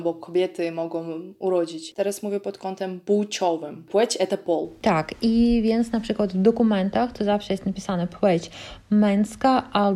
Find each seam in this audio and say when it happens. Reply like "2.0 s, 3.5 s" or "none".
none